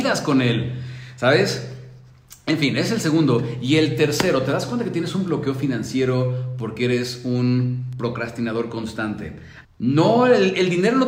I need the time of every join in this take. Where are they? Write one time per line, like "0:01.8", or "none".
0:09.6